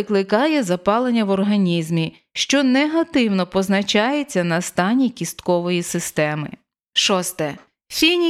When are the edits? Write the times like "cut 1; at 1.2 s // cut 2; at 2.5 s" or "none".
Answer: none